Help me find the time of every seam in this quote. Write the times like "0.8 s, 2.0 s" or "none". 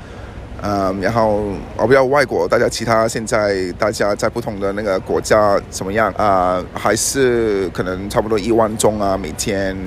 6.1 s